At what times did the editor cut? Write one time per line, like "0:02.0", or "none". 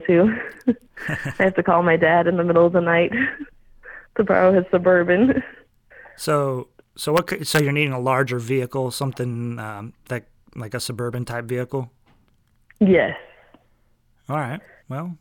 none